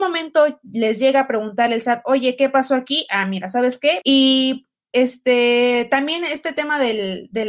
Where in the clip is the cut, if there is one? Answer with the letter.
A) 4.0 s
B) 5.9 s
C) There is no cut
A